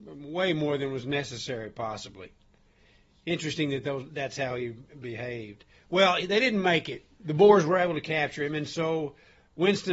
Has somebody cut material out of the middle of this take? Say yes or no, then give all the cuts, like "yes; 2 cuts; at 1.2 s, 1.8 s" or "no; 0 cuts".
no; 0 cuts